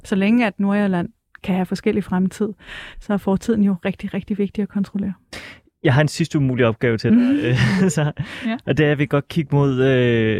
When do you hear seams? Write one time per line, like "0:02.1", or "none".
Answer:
none